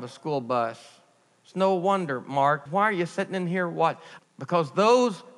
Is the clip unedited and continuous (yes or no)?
no